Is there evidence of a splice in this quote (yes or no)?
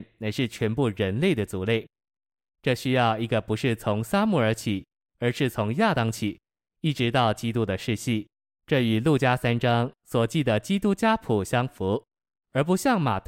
no